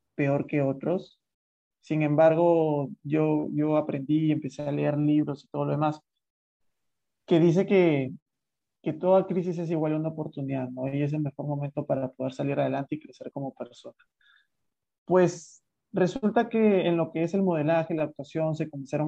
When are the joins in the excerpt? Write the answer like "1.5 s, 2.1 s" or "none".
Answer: none